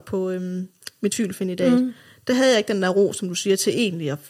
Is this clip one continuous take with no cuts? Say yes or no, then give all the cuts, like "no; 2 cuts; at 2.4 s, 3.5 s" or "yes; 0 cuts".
yes; 0 cuts